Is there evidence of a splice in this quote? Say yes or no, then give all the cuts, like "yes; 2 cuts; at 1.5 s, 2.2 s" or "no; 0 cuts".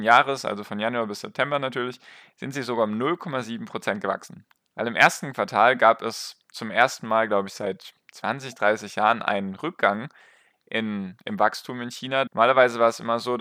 yes; 2 cuts; at 4.7 s, 12.3 s